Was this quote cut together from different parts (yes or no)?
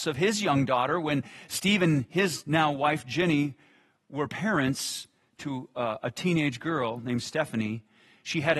no